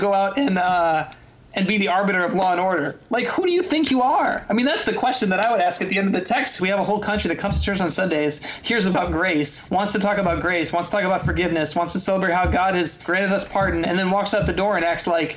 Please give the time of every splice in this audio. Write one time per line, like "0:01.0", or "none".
0:06.6